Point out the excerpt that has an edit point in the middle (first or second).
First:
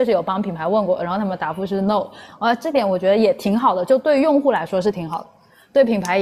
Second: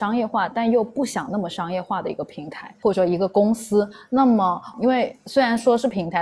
second